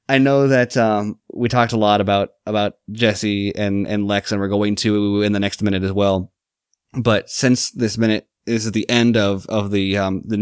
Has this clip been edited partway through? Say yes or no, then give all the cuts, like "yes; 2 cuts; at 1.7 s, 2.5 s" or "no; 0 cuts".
no; 0 cuts